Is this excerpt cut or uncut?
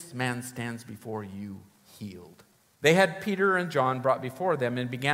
cut